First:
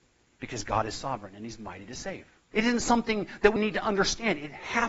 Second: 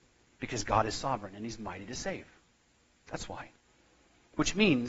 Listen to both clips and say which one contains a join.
first; 2 cuts; at 2.5 s, 3.6 s

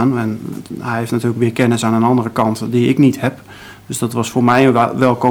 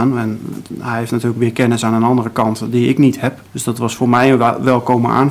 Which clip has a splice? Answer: second; 1 cut; at 3.5 s

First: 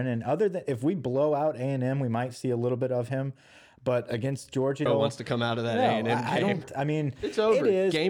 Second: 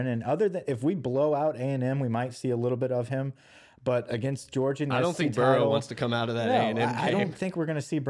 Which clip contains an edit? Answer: first; 2 cuts; at 4.9 s, 6.6 s

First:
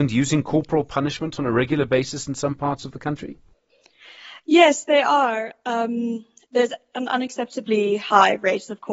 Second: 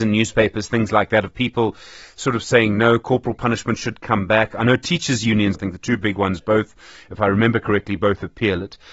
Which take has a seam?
second; 1 cut; at 5.5 s

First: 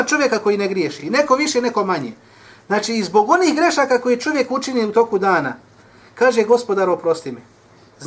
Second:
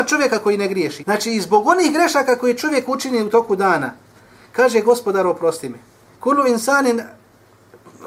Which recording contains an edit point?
second; 2 cuts; at 1.0 s, 6.1 s

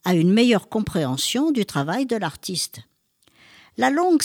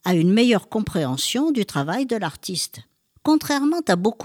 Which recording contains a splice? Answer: second; 1 cut; at 3.1 s

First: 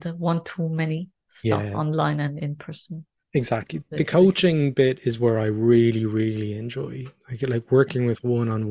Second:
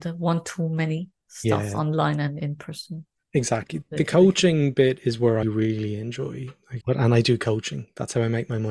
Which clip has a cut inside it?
second; 2 cuts; at 5.4 s, 6.8 s

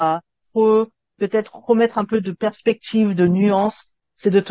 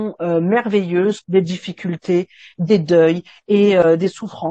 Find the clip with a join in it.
second; 1 cut; at 1.2 s

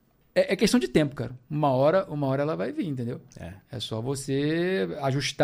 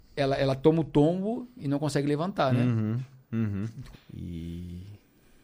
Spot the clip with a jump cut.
second; 1 cut; at 3.9 s

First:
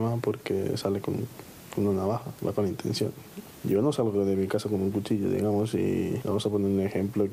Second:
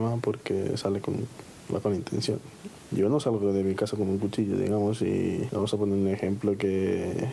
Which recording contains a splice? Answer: second; 1 cut; at 1.7 s

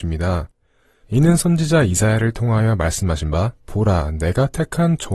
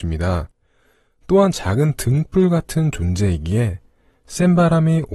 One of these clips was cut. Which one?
first; 2 cuts; at 1.0 s, 3.6 s

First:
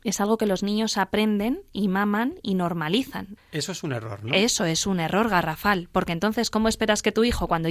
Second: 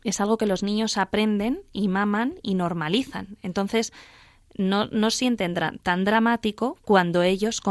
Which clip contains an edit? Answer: first; 1 cut; at 3.4 s

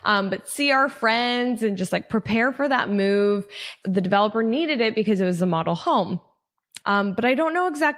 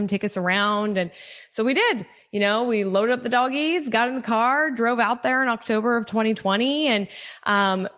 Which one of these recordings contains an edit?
first; 2 cuts; at 3.8 s, 6.8 s

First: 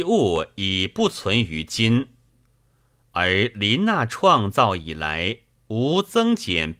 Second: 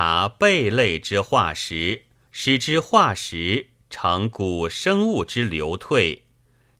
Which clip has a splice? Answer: second; 1 cut; at 2.3 s

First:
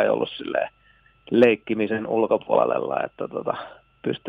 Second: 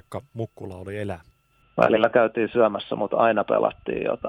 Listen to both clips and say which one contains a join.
second; 1 cut; at 1.6 s

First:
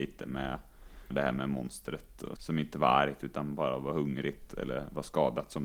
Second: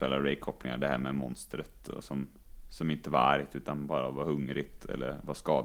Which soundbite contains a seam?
first; 2 cuts; at 1.1 s, 2.4 s

